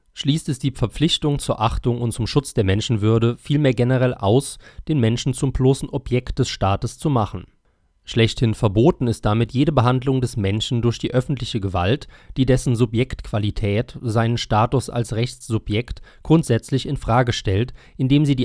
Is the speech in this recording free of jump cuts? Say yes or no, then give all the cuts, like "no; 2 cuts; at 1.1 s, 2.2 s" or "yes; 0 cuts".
yes; 0 cuts